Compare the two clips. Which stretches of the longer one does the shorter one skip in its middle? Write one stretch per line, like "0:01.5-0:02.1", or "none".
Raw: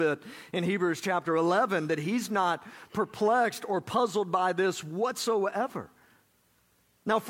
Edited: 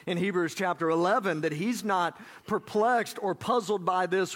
none